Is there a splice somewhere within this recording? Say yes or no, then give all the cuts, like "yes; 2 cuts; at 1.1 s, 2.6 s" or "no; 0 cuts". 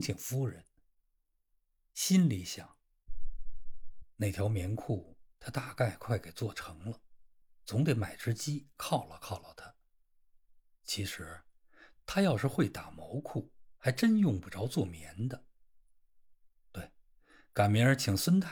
no; 0 cuts